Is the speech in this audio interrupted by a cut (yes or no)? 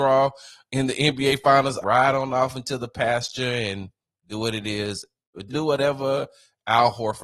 yes